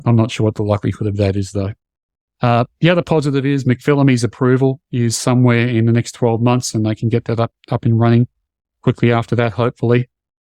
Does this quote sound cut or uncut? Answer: uncut